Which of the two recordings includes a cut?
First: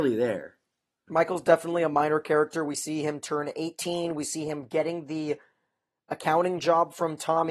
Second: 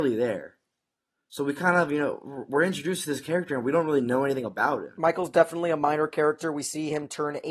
first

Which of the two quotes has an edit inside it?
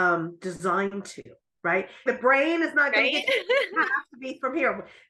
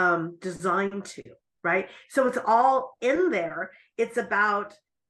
first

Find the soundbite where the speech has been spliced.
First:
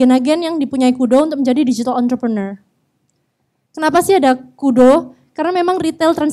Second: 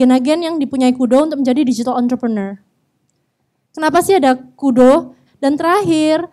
second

